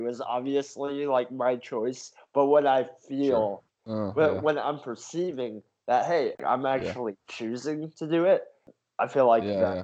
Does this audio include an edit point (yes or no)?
yes